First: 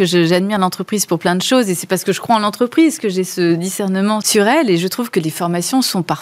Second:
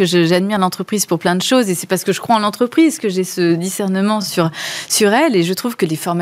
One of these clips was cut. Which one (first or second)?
first